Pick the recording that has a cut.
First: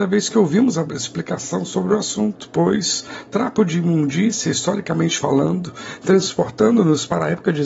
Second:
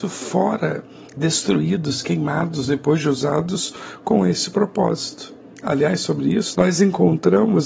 second; 1 cut; at 6.5 s

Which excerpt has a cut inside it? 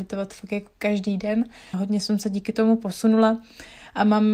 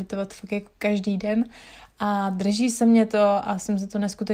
first; 1 cut; at 1.7 s

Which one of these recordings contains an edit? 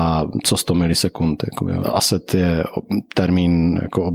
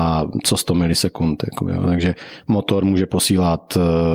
first; 1 cut; at 1.8 s

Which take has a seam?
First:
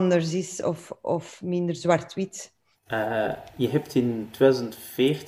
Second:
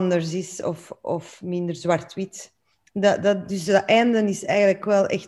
first; 1 cut; at 2.7 s

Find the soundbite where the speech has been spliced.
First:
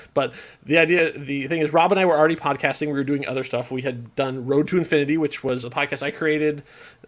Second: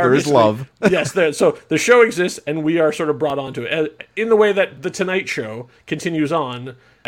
first; 1 cut; at 5.6 s

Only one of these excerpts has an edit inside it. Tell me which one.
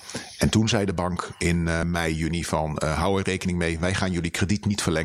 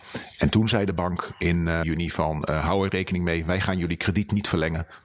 second; 1 cut; at 1.8 s

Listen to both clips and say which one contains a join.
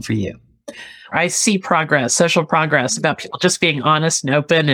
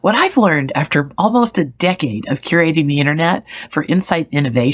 first; 1 cut; at 1.1 s

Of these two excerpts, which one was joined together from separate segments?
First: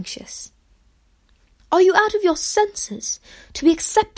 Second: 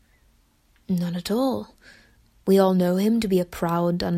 first; 1 cut; at 1.6 s

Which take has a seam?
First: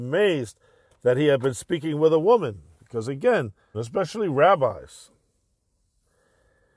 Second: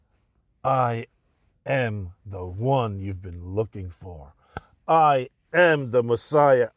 first; 1 cut; at 3.7 s

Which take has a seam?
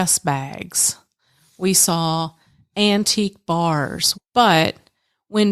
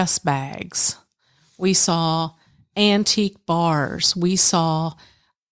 first; 1 cut; at 4.1 s

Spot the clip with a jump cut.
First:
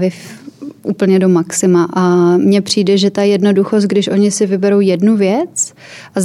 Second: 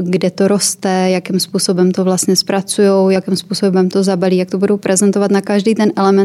second; 1 cut; at 3.2 s

